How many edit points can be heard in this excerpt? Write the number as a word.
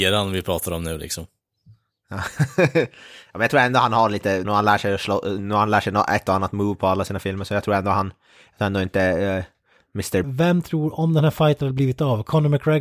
two